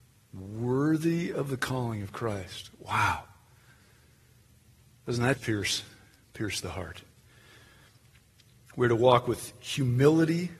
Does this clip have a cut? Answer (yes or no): yes